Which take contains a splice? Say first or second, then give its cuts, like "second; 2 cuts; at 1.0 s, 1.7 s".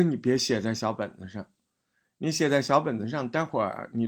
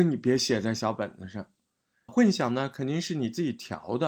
second; 1 cut; at 2.1 s